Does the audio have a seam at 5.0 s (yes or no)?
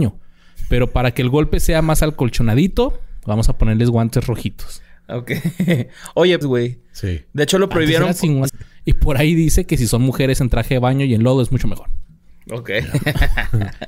no